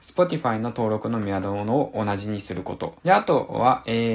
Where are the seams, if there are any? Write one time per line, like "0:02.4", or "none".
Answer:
0:03.0